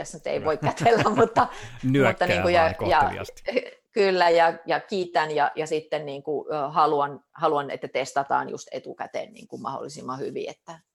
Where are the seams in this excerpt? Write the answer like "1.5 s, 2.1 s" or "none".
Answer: none